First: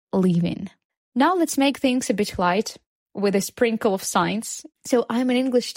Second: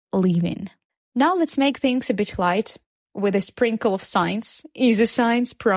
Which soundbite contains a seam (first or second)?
first